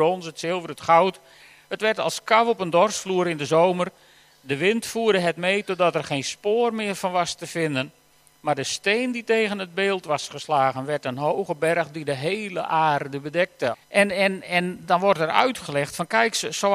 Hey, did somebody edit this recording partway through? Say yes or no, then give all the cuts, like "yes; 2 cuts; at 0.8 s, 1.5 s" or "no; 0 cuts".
yes; 1 cut; at 13.7 s